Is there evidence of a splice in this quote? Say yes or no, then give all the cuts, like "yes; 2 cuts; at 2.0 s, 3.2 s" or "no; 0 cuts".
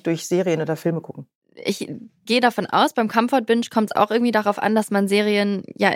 no; 0 cuts